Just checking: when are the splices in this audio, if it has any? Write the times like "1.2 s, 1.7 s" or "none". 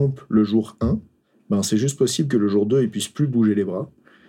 none